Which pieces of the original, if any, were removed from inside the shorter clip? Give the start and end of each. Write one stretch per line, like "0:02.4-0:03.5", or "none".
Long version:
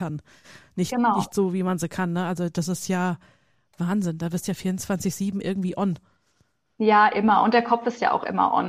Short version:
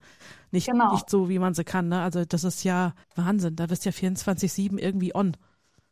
0:03.3-0:03.7